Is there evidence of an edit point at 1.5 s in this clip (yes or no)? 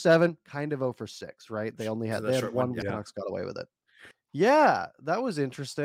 no